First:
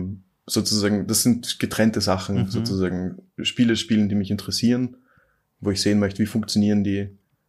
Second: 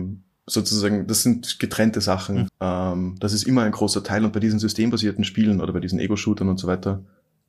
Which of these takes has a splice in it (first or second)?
second